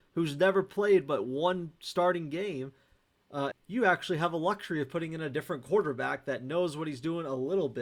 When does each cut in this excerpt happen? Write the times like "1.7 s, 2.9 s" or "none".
3.5 s